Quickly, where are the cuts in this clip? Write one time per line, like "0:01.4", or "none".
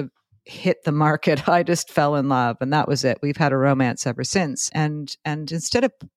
0:04.7